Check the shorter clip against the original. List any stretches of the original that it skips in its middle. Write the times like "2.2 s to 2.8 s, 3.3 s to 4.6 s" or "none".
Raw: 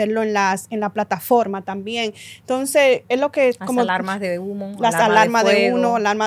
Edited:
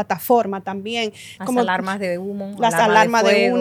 2.4 s to 3.6 s